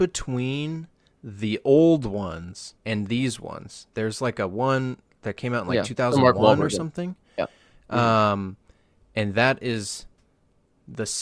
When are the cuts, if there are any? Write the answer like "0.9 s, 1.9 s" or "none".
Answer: 2.8 s